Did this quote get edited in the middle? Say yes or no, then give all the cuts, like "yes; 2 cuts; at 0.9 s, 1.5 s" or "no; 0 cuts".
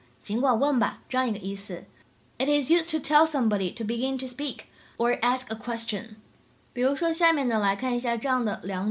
no; 0 cuts